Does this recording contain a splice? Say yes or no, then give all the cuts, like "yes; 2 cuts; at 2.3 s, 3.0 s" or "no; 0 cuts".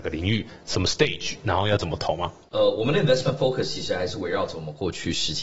no; 0 cuts